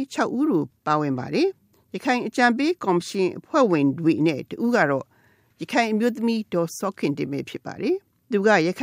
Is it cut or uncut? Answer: uncut